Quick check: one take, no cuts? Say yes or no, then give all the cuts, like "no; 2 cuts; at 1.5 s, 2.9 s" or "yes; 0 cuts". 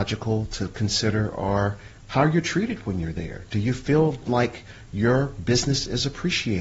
yes; 0 cuts